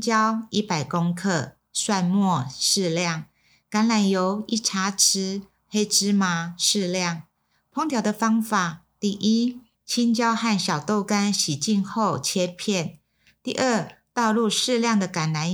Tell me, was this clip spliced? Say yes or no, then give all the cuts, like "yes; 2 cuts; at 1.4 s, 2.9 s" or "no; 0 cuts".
yes; 1 cut; at 9.7 s